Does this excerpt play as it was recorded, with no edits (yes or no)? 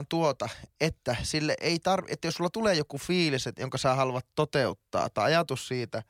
yes